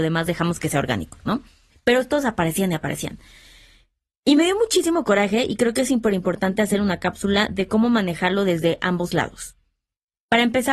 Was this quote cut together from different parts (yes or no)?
no